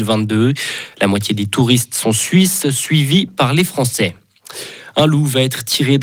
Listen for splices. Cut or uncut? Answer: uncut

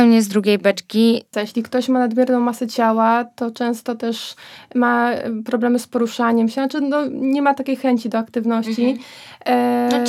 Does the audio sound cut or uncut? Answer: cut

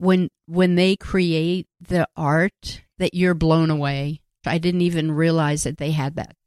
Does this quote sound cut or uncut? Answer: cut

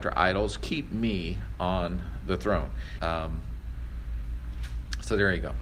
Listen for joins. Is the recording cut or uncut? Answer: cut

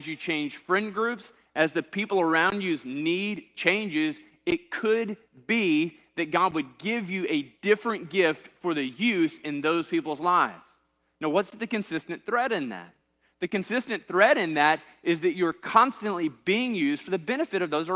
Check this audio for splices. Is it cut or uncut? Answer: uncut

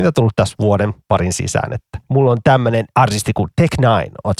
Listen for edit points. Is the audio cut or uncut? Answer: uncut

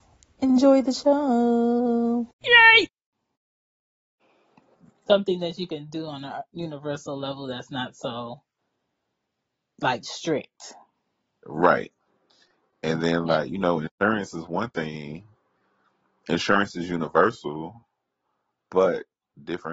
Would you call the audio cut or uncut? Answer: uncut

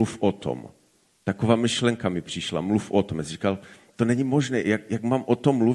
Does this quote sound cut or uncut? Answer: uncut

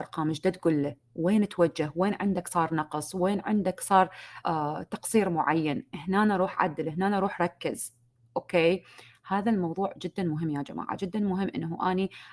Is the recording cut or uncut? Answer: cut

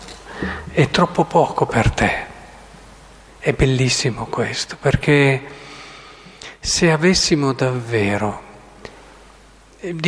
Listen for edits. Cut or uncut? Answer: uncut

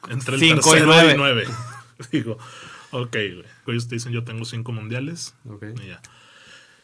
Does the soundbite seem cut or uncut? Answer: cut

